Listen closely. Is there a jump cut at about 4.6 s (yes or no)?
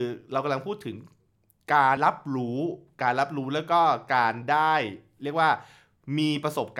no